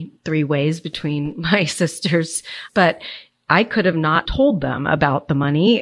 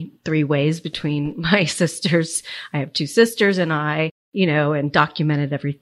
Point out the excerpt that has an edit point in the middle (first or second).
first